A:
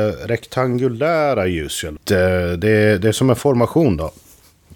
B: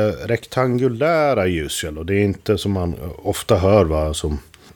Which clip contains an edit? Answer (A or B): A